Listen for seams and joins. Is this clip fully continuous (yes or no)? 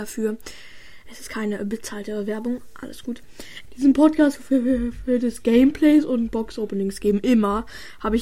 no